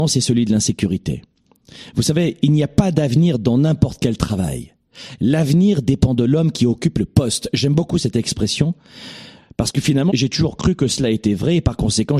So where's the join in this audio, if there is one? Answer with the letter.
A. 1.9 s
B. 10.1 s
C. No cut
B